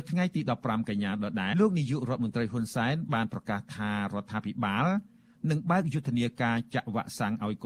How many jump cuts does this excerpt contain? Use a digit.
1